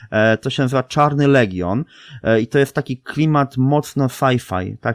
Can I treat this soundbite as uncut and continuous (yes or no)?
yes